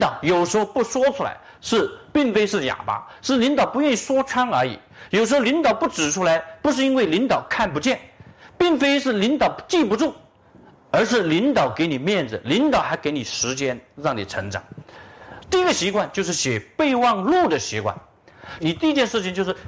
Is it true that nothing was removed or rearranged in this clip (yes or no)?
no